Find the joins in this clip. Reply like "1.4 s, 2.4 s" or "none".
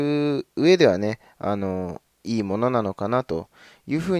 none